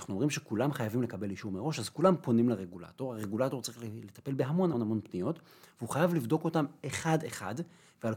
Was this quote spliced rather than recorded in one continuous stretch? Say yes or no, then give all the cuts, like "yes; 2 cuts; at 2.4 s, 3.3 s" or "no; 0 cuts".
yes; 1 cut; at 4.7 s